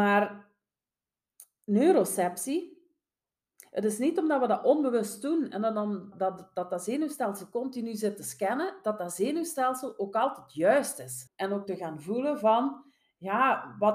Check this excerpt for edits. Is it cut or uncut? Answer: cut